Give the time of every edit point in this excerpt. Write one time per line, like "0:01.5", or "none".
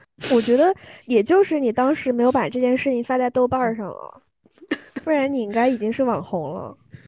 none